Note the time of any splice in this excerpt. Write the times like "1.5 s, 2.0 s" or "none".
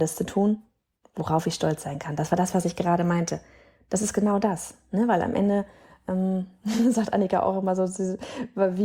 none